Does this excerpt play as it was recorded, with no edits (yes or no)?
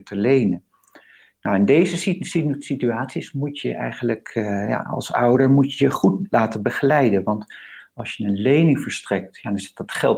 yes